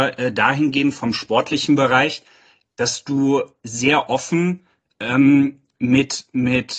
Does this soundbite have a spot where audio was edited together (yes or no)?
no